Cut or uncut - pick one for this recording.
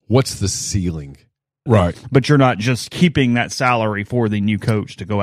cut